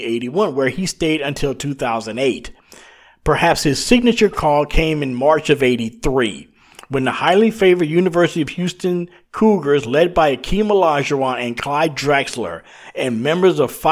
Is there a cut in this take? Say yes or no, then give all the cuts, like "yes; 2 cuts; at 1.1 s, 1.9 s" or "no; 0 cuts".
no; 0 cuts